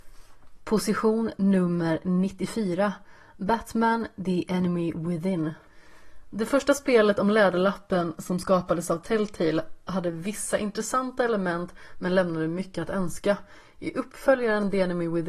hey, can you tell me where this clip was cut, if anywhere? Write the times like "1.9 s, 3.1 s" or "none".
none